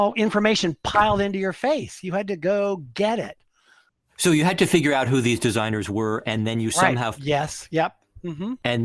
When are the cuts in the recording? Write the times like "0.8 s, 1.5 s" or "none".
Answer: 7.2 s